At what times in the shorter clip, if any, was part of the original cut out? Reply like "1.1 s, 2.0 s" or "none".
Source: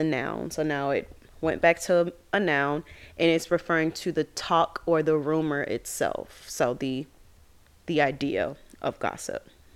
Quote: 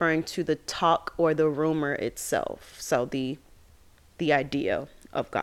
none

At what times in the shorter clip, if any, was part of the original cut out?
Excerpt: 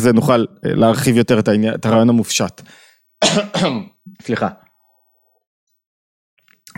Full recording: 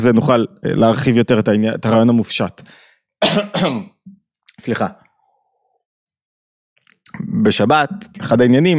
4.1 s

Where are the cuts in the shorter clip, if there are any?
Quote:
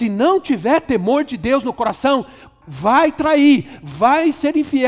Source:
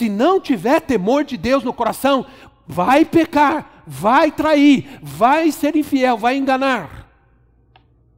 2.6 s

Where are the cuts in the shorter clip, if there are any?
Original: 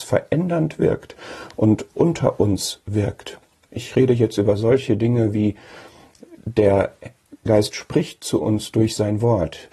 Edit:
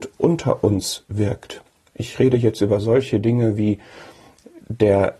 none

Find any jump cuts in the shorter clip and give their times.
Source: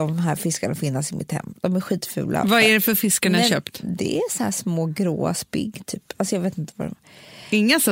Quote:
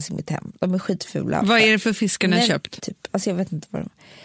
2.8 s

